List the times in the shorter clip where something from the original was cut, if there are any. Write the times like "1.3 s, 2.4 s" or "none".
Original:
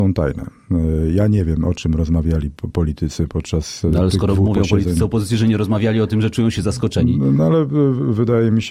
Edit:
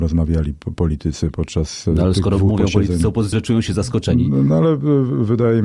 3.3 s